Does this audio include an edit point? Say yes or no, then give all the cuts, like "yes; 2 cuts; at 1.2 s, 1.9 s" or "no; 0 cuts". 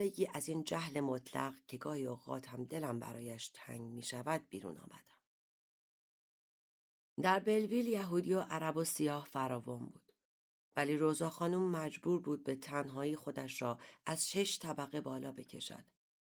no; 0 cuts